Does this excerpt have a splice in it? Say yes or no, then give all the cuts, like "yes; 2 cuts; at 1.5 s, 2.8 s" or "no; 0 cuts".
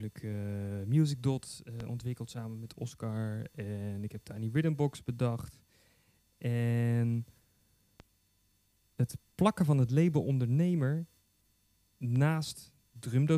no; 0 cuts